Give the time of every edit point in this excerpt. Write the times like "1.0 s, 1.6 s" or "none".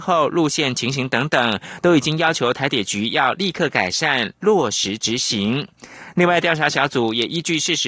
none